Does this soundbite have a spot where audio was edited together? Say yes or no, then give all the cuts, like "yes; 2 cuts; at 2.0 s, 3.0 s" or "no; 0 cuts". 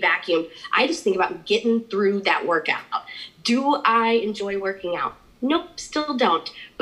no; 0 cuts